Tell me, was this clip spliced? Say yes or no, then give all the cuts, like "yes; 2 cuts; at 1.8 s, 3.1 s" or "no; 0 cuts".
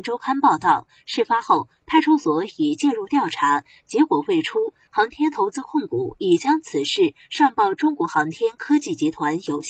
no; 0 cuts